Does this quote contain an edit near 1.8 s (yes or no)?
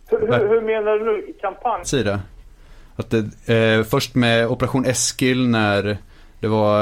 yes